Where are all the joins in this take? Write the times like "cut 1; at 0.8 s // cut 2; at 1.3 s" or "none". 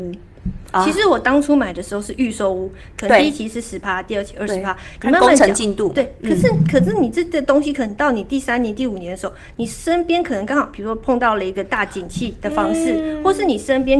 cut 1; at 2.9 s